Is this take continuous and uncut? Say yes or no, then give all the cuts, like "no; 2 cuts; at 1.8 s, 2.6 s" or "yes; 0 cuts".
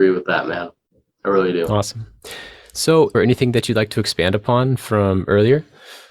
no; 1 cut; at 3.1 s